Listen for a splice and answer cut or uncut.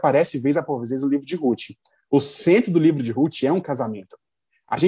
uncut